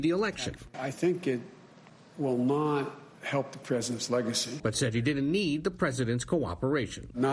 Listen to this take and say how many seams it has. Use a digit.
1